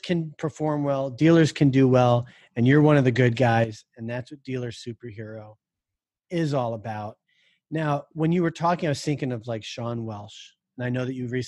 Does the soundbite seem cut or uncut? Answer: uncut